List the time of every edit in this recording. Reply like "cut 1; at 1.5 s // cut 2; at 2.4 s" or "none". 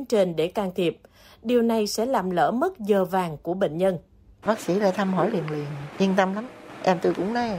cut 1; at 4.4 s